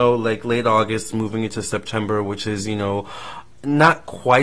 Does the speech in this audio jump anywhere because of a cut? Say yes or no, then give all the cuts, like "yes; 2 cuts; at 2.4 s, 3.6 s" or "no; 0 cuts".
no; 0 cuts